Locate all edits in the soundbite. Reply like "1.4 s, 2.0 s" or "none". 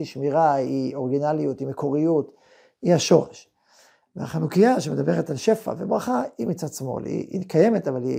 none